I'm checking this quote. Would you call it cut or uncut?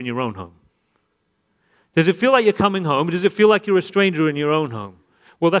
uncut